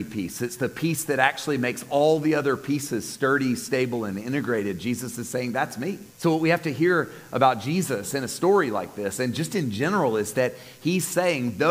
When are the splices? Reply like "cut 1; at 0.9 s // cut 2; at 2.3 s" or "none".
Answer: cut 1; at 6.1 s

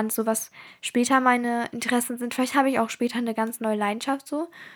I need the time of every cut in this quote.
none

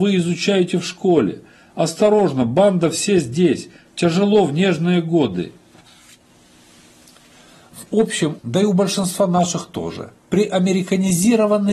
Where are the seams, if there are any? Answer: cut 1; at 8.4 s // cut 2; at 10.2 s

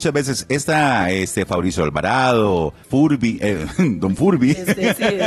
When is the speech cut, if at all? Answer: cut 1; at 2.8 s

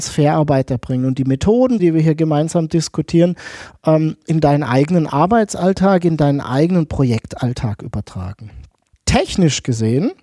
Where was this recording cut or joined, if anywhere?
cut 1; at 1.8 s // cut 2; at 8.9 s

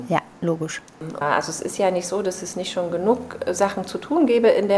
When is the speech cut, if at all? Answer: cut 1; at 1.2 s

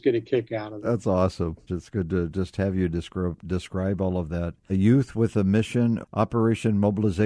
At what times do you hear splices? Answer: cut 1; at 1.7 s // cut 2; at 4.7 s // cut 3; at 6.0 s

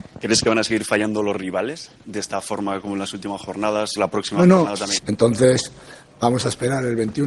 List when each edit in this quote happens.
cut 1; at 4.0 s // cut 2; at 5.0 s

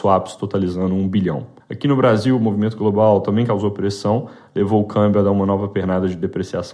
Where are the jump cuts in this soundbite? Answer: cut 1; at 1.6 s

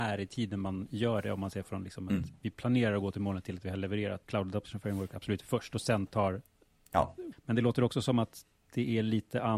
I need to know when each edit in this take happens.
cut 1; at 4.2 s // cut 2; at 7.3 s

